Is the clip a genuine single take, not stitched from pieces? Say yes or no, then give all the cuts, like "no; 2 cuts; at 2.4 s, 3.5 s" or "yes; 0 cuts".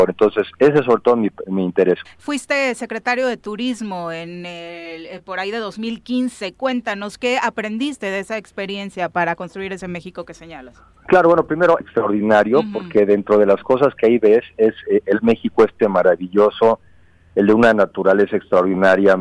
no; 2 cuts; at 2.0 s, 11.8 s